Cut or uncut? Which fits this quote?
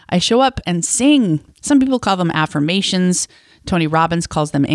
cut